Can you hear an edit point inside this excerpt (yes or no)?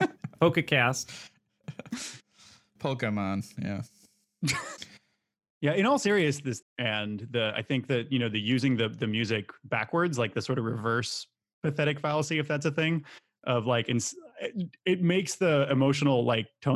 yes